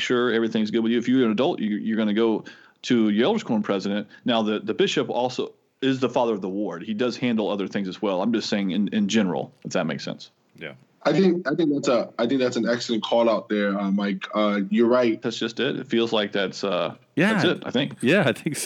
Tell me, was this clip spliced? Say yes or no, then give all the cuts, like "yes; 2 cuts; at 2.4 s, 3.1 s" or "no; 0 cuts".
yes; 1 cut; at 15.2 s